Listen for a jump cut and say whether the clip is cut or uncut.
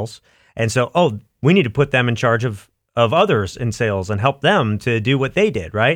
uncut